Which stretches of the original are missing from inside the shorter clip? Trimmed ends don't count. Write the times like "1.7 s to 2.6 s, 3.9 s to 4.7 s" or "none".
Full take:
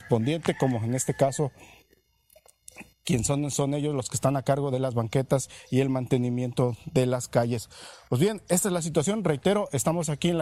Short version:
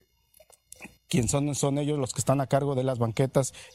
none